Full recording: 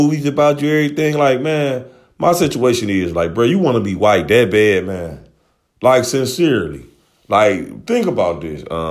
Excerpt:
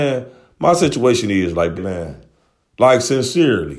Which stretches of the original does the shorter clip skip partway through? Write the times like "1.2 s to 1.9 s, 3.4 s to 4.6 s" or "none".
3.4 s to 4.8 s